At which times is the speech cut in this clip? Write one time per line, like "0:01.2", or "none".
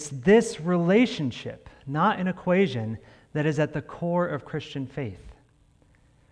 none